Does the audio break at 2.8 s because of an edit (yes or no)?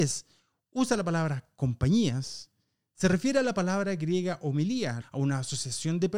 no